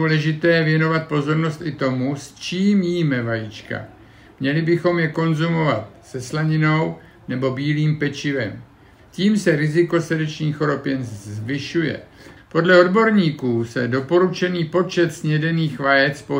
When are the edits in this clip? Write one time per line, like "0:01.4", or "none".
0:12.4